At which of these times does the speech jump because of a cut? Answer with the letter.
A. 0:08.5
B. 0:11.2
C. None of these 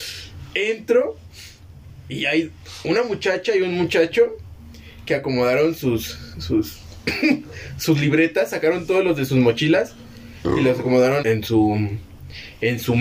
B